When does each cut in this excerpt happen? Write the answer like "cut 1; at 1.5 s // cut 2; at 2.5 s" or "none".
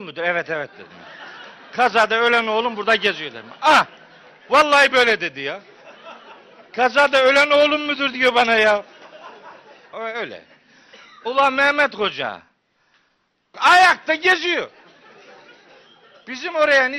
cut 1; at 9.9 s // cut 2; at 13.5 s